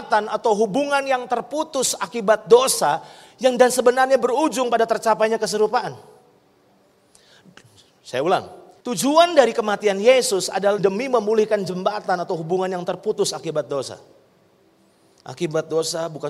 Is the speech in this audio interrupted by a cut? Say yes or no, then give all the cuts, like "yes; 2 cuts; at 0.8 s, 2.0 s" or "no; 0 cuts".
yes; 1 cut; at 10.8 s